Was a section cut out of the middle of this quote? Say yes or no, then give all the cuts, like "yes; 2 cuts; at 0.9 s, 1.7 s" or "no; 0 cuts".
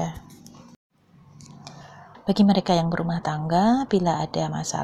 yes; 1 cut; at 2.1 s